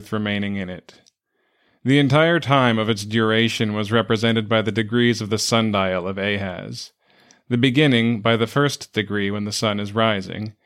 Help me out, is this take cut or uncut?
uncut